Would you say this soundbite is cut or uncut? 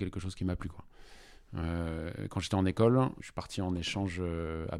cut